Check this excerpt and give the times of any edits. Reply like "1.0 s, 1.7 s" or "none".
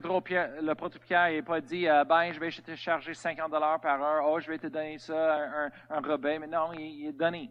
none